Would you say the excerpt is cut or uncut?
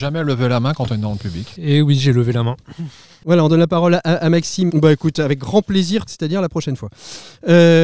cut